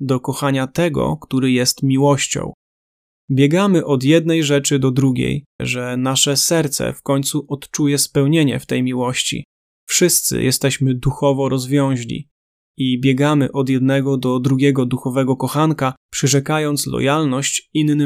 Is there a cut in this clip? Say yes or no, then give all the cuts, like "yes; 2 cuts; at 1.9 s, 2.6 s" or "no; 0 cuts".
yes; 1 cut; at 5.6 s